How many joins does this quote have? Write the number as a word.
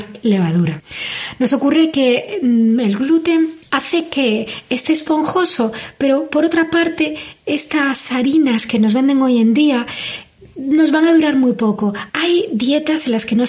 one